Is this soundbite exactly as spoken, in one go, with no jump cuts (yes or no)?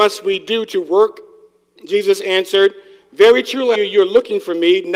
no